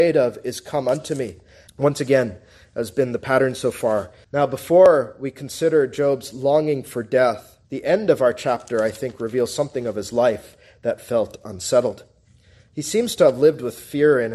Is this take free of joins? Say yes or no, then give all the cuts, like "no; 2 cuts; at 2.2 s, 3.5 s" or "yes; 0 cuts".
no; 3 cuts; at 1.7 s, 4.2 s, 7.6 s